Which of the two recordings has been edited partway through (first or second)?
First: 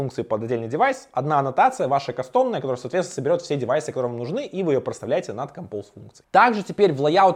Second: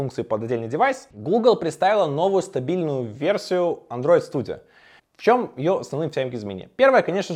second